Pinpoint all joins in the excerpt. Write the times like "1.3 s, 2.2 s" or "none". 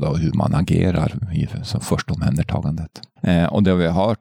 3.2 s